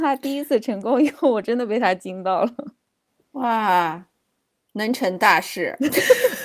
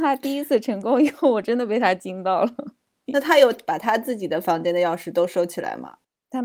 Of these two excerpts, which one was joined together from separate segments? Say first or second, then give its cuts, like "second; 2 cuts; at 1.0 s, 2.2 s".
second; 1 cut; at 3.1 s